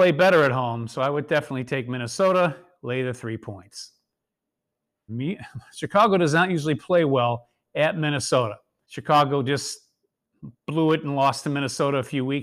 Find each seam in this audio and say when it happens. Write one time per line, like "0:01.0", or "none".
0:05.1
0:08.8